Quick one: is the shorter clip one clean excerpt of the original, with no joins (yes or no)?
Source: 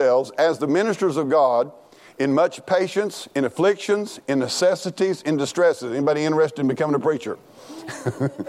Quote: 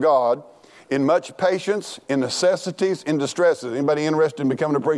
no